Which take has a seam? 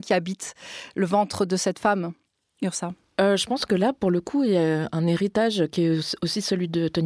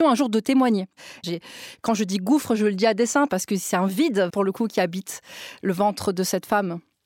second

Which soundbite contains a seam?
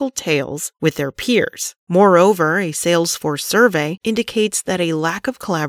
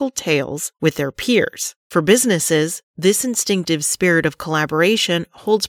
first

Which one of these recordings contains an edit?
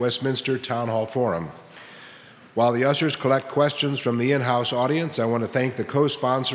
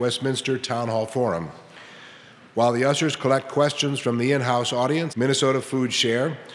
second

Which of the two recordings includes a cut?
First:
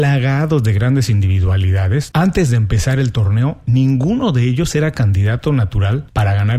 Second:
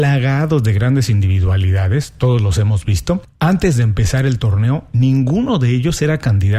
first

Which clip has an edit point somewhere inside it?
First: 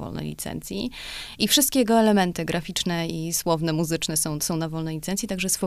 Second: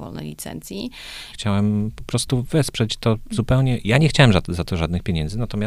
second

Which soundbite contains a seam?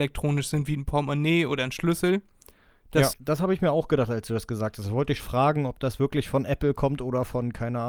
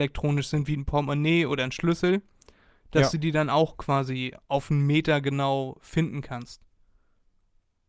first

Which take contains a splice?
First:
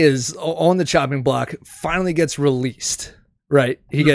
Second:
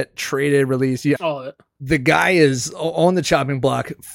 second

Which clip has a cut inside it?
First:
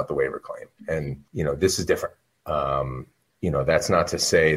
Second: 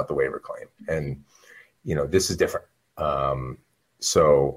first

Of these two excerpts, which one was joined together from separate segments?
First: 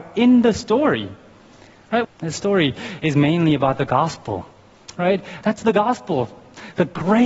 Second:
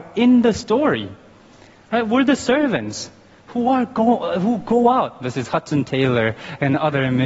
first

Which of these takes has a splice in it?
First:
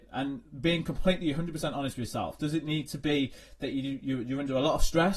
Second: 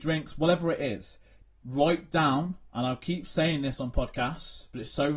second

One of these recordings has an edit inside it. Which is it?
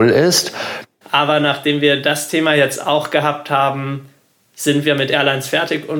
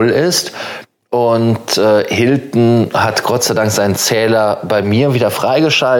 first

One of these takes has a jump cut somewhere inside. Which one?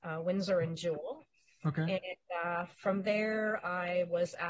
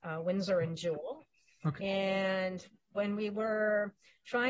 second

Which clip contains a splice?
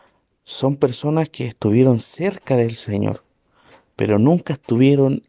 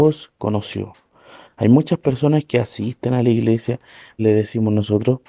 second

